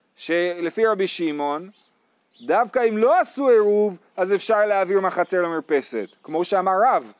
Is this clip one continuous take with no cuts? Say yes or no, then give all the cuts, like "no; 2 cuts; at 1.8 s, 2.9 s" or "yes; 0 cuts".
yes; 0 cuts